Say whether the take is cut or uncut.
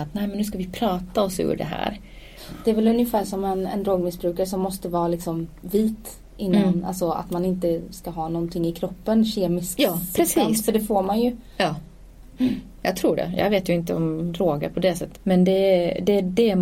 cut